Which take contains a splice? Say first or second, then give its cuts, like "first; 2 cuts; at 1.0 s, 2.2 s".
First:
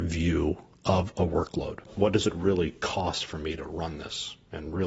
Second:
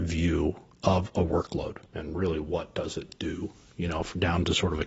second; 1 cut; at 1.8 s